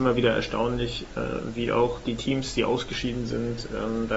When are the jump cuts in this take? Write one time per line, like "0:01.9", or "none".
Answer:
none